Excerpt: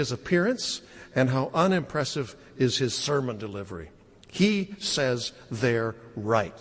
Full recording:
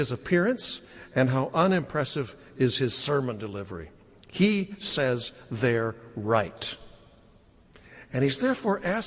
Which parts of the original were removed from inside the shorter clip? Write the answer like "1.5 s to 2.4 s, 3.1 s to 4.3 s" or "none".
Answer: none